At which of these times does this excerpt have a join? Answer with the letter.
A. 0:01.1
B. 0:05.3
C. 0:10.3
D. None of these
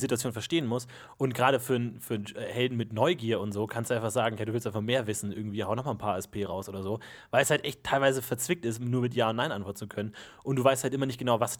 D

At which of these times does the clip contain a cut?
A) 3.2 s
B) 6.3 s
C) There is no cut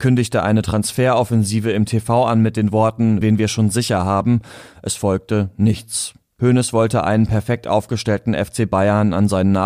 A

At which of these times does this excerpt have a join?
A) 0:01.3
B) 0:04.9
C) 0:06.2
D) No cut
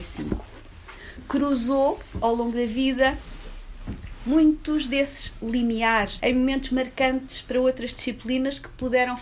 C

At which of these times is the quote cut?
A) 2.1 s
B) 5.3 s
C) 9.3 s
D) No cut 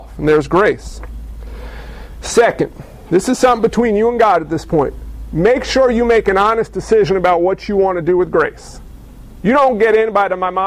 D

